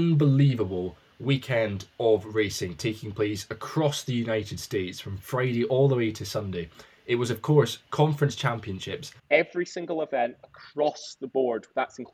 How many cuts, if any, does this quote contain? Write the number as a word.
one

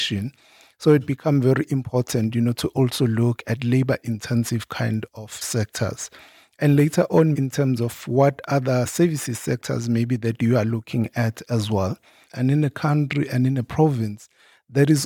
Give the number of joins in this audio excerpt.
two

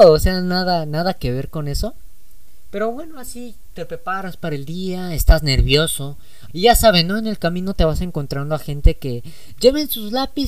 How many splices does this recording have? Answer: one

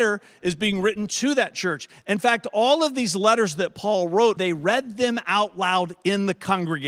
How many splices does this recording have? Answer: one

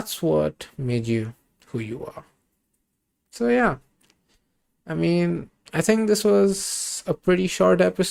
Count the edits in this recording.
zero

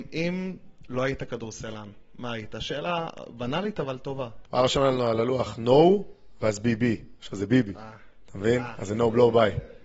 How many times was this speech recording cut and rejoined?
one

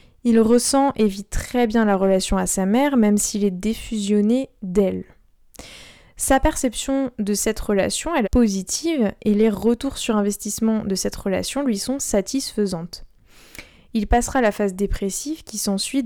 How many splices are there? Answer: one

